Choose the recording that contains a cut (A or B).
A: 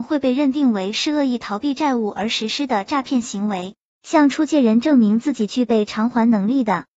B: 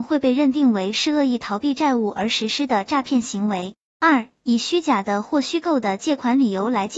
A